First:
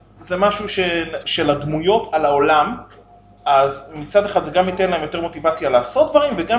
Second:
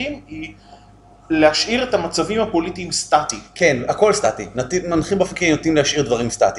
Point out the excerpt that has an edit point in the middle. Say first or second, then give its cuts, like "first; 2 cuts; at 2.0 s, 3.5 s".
first; 2 cuts; at 1.2 s, 3.4 s